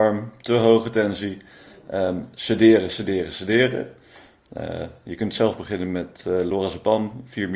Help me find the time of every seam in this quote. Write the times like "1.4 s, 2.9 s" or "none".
none